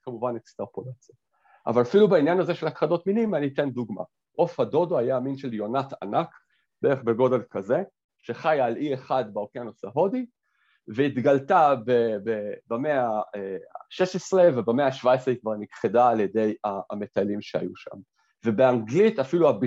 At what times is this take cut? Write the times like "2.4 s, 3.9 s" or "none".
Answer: 4.3 s